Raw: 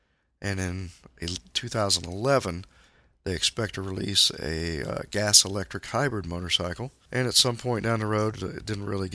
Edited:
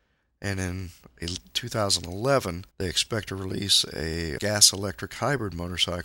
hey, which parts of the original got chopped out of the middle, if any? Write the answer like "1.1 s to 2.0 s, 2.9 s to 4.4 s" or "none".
2.7 s to 3.2 s, 4.8 s to 5.1 s